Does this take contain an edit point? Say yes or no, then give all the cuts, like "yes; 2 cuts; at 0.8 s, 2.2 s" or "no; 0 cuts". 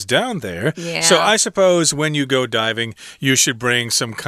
no; 0 cuts